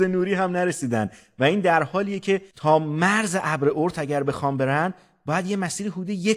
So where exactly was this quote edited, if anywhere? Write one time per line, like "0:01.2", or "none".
0:02.5